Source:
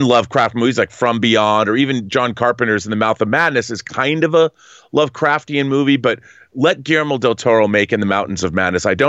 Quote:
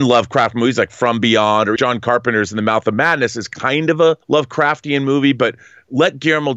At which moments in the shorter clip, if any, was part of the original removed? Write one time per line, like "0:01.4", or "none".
0:01.8
0:04.2